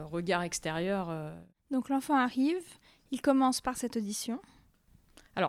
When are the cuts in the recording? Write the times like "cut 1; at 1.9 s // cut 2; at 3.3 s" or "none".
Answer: none